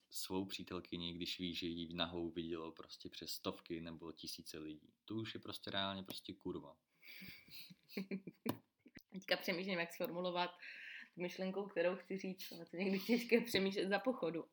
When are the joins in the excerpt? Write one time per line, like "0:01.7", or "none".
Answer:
none